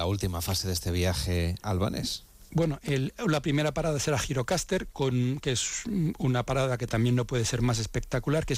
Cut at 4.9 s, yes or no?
no